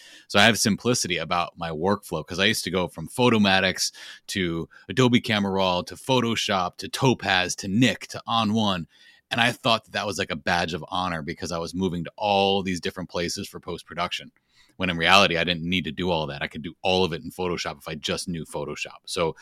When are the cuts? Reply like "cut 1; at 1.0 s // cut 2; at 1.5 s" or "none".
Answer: none